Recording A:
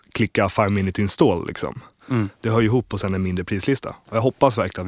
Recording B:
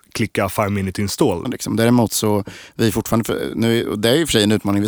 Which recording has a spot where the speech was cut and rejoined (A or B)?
B